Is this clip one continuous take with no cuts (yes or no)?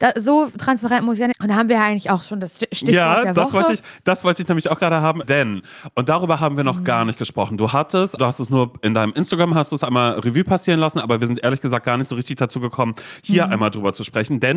no